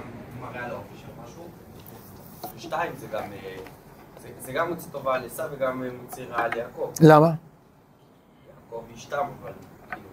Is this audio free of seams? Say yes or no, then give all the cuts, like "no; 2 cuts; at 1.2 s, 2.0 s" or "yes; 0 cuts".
yes; 0 cuts